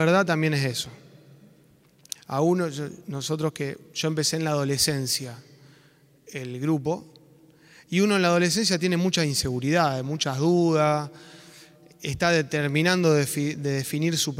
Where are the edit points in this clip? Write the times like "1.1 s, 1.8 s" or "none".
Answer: 2.2 s